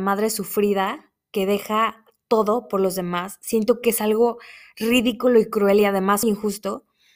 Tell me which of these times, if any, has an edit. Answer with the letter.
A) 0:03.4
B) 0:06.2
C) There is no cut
B